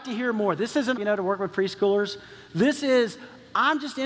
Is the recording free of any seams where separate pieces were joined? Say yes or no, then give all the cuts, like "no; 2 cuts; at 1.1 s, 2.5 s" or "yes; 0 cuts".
no; 1 cut; at 1.0 s